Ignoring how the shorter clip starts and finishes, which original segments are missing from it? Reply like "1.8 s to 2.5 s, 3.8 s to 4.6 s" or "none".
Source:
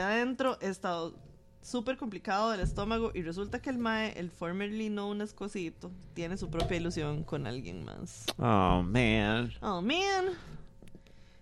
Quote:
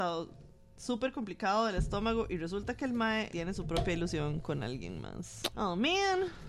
4.1 s to 6.1 s, 8.4 s to 9.6 s